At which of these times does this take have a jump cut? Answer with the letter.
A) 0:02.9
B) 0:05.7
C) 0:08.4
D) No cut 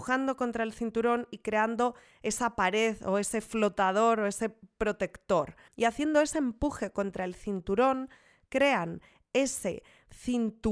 B